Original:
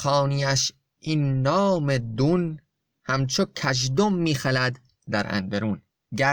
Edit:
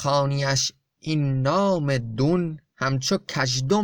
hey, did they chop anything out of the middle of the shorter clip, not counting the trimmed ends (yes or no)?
yes